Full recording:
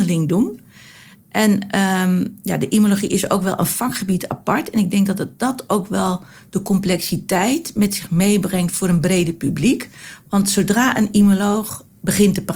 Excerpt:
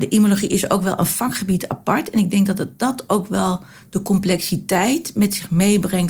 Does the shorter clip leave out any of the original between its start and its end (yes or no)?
no